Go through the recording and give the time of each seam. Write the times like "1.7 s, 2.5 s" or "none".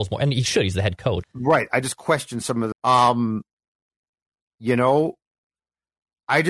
1.2 s, 2.7 s